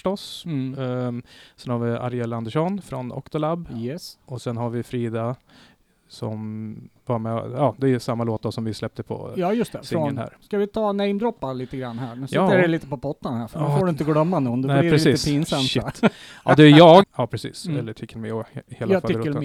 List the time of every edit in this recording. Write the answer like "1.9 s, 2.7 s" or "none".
10.4 s, 17.0 s